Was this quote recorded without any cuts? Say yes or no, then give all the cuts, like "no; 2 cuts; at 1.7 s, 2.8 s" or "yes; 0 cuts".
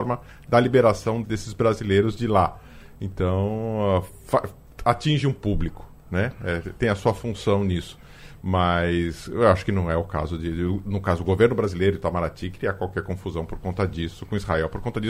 no; 1 cut; at 1.2 s